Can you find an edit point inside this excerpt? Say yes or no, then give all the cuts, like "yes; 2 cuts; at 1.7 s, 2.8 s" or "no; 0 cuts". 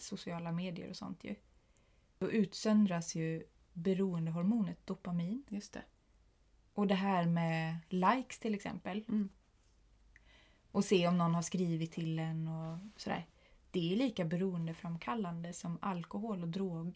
no; 0 cuts